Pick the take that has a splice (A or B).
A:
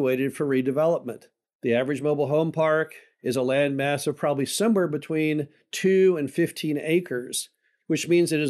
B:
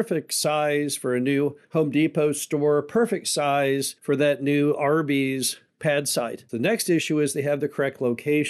B